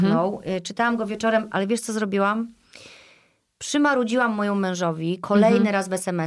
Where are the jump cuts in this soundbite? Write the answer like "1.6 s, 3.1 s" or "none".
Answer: 1.5 s